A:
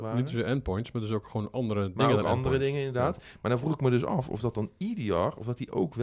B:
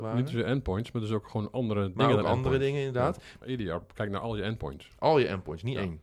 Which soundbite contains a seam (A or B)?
B